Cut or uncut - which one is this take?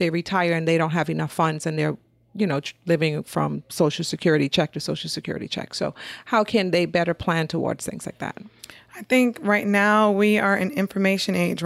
uncut